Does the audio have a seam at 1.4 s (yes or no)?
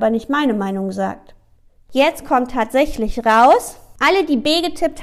no